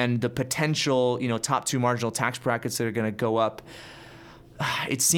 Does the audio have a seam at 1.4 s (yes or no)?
no